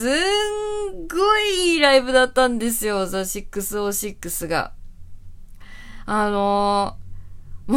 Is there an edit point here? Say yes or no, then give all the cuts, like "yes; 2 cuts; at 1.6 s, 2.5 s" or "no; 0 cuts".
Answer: no; 0 cuts